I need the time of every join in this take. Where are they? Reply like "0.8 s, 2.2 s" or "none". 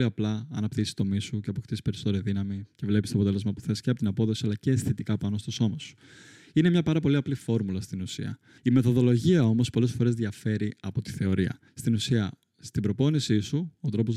8.6 s, 11.7 s